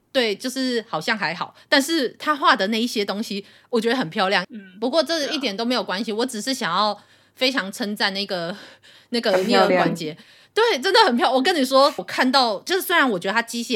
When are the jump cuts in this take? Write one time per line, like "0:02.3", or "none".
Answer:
0:04.4
0:12.0